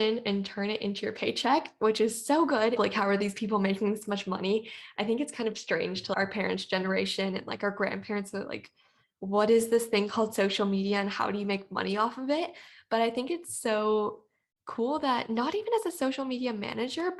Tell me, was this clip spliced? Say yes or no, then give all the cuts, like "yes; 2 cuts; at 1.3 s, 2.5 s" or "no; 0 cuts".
yes; 1 cut; at 2.8 s